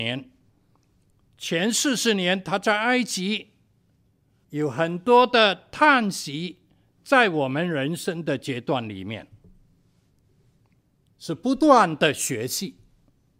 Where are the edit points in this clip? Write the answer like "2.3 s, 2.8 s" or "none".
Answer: 4.4 s, 11.1 s